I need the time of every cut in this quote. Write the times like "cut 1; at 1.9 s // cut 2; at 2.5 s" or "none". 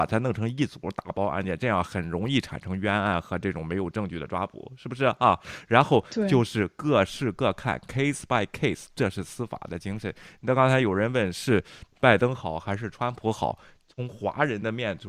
none